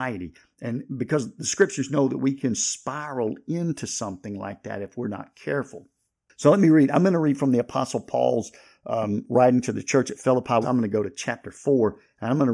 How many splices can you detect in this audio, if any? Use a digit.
1